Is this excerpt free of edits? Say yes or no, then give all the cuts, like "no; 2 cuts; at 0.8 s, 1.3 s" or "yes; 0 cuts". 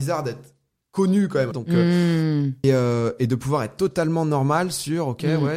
no; 2 cuts; at 1.5 s, 2.6 s